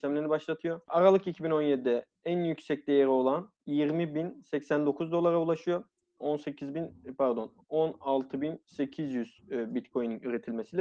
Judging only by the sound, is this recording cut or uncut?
cut